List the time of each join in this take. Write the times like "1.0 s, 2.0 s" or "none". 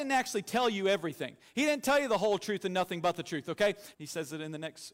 3.9 s